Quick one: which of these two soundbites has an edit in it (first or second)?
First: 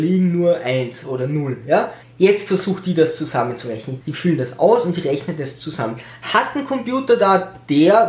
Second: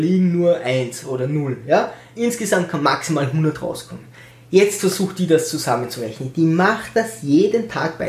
first